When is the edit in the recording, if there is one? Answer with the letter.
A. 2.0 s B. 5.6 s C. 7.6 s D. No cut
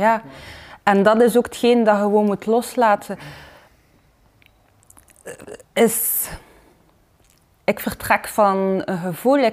B